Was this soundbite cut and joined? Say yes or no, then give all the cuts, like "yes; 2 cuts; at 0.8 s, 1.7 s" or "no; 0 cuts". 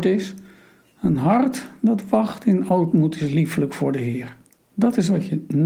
yes; 1 cut; at 4.6 s